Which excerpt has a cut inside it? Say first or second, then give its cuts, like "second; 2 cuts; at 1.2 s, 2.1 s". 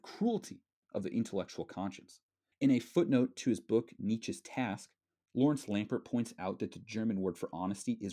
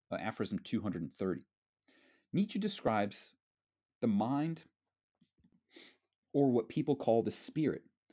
first; 1 cut; at 2.5 s